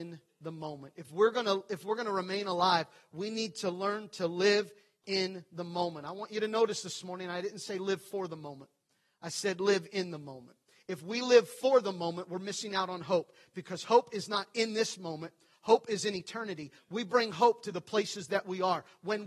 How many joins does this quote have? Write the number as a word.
one